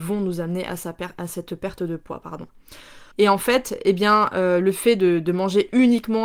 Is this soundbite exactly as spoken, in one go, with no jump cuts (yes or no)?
no